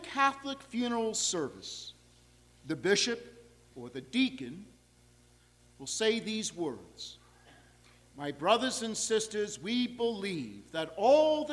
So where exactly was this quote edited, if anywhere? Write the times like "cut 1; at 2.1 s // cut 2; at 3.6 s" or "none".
cut 1; at 3.7 s